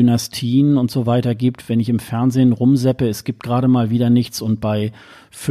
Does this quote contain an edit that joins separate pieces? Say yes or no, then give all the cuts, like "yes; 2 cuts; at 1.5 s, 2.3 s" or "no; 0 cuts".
no; 0 cuts